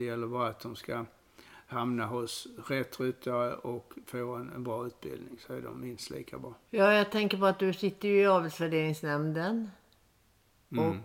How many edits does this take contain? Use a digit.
1